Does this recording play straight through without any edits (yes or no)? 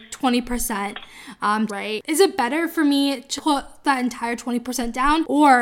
no